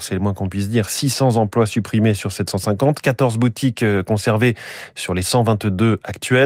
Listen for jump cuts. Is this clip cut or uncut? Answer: uncut